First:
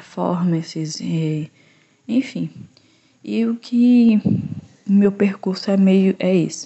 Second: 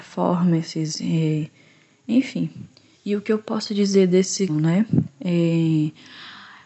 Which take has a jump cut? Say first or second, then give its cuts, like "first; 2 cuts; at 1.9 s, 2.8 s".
second; 2 cuts; at 2.9 s, 4.5 s